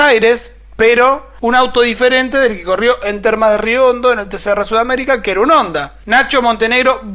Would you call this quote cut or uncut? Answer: uncut